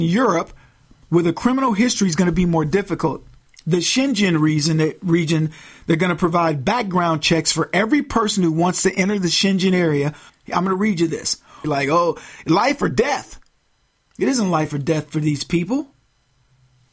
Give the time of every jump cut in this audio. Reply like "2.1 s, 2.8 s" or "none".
10.3 s, 11.6 s

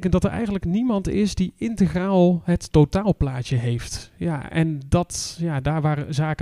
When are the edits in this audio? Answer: none

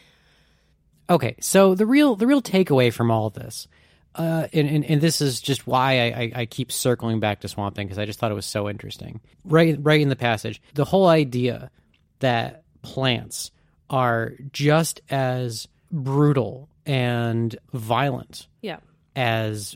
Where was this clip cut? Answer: 4.5 s

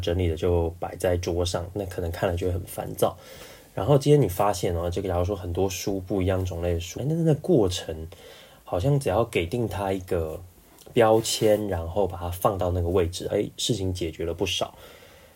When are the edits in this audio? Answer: 7.0 s, 13.3 s

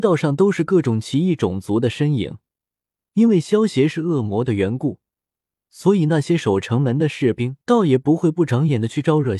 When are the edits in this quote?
3.0 s, 7.6 s

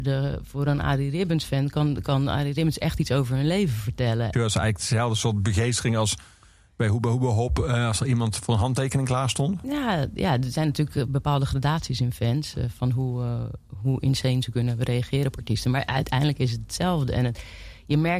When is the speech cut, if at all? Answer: 4.3 s

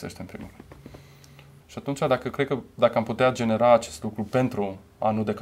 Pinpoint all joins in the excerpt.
1.6 s

